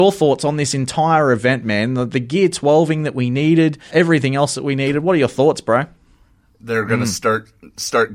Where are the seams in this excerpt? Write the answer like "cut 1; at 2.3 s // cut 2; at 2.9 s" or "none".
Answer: cut 1; at 3.9 s // cut 2; at 6.5 s